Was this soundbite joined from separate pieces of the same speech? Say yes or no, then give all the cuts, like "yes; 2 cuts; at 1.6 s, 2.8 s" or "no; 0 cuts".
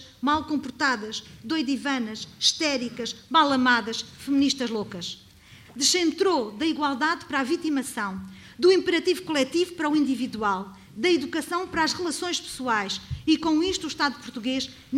yes; 1 cut; at 5.6 s